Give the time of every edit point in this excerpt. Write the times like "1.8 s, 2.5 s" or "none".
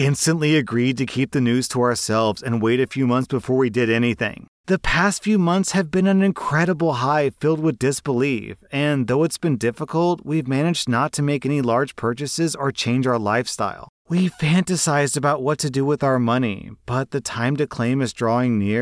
none

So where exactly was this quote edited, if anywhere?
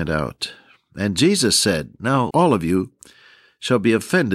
2.3 s

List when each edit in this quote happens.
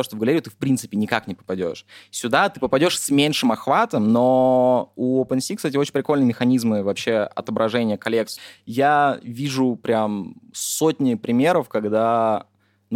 none

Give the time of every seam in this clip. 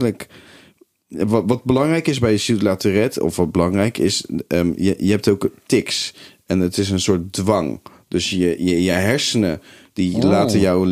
none

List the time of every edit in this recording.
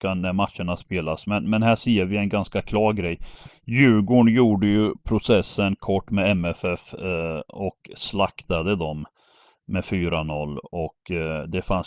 none

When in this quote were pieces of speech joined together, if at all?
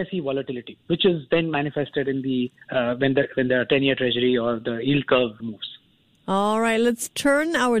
2.6 s, 5.4 s

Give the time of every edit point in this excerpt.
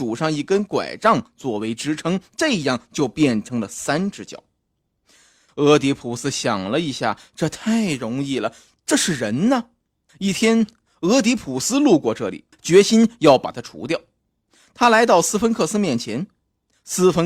5.5 s, 10.1 s, 12.5 s

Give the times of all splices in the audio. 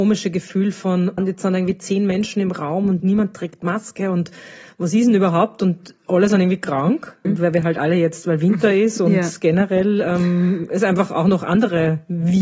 1.2 s, 7.2 s

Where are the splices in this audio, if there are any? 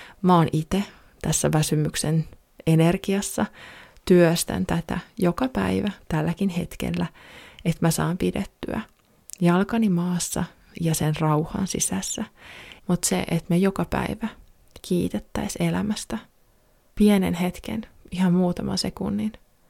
12.8 s

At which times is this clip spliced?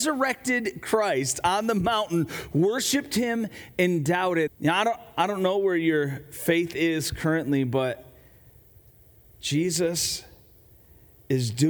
4.5 s

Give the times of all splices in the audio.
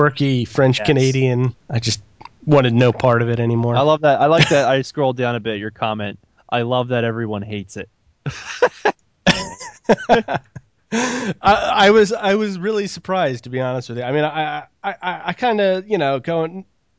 1.5 s

